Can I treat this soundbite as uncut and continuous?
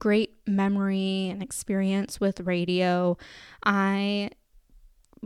yes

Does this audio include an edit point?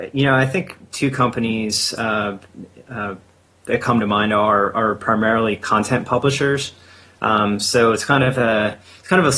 no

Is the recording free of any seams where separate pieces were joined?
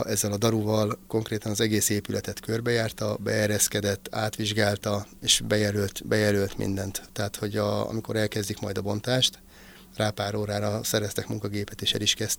yes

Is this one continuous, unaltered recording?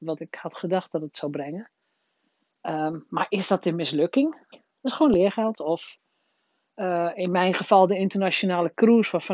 no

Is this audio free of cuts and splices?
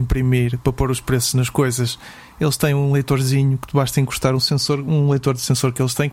yes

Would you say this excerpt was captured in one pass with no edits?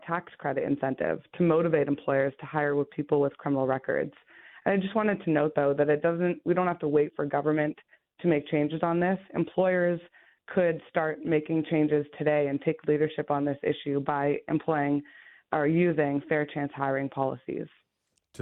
yes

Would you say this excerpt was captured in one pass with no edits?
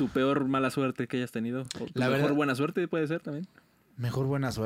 yes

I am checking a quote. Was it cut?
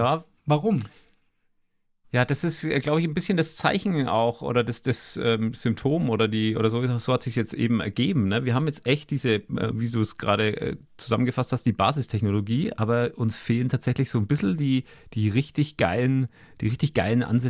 no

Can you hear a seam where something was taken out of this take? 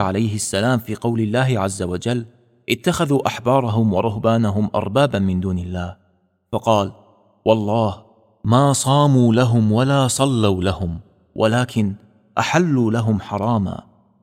no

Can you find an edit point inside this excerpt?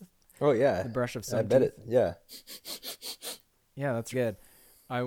yes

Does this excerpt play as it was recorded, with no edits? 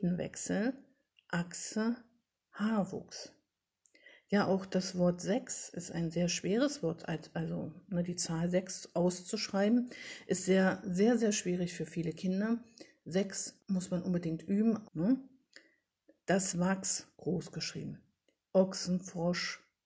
no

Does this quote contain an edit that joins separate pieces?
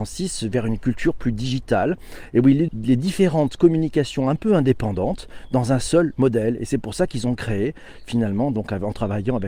yes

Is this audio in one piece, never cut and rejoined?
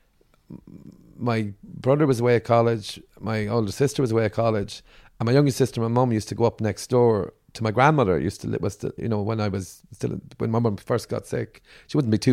yes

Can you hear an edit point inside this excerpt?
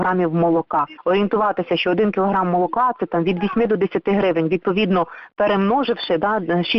no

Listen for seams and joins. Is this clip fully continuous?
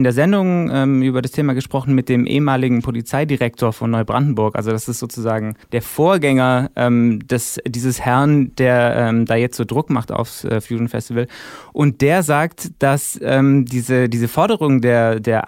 no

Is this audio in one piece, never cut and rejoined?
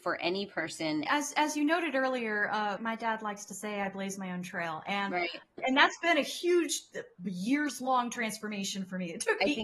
no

